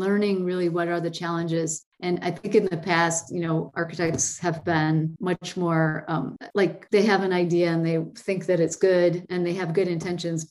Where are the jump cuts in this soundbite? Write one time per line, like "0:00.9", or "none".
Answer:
none